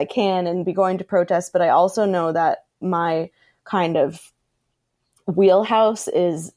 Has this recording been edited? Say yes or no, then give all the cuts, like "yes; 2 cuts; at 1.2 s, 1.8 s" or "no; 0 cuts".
no; 0 cuts